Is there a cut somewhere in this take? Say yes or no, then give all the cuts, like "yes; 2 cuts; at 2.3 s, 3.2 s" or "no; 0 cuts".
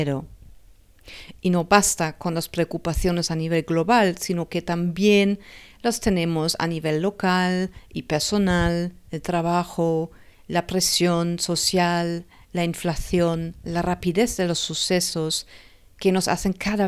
no; 0 cuts